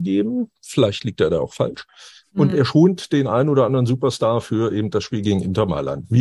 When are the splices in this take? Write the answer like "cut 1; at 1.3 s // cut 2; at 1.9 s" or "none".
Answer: none

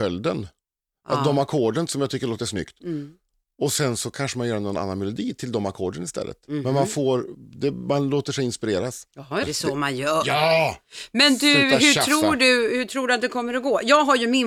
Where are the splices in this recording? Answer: cut 1; at 9.4 s

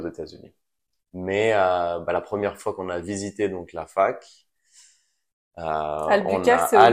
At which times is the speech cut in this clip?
cut 1; at 1.0 s

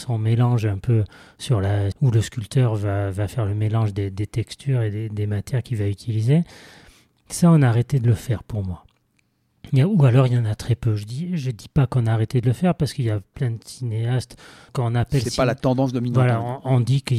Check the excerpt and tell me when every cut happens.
cut 1; at 1.9 s // cut 2; at 14.7 s

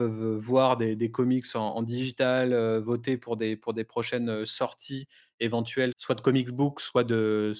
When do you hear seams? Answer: cut 1; at 5.9 s

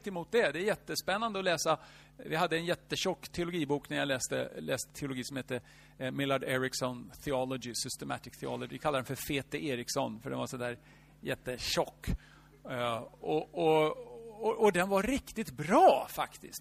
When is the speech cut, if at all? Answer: none

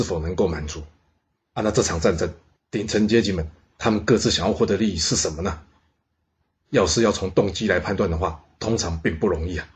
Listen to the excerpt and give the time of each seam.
none

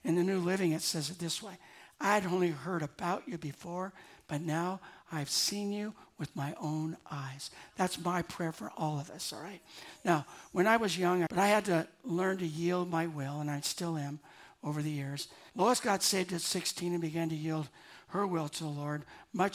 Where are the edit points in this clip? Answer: cut 1; at 11.3 s // cut 2; at 15.5 s

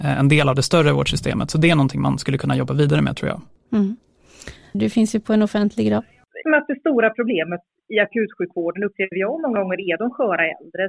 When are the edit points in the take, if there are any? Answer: cut 1; at 4.7 s // cut 2; at 6.4 s

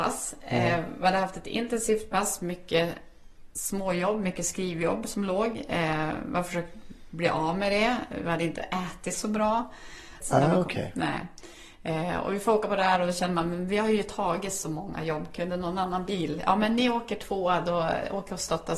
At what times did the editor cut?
cut 1; at 10.2 s

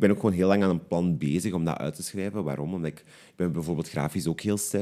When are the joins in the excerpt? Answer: none

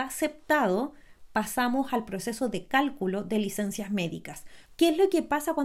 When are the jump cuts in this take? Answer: cut 1; at 4.7 s

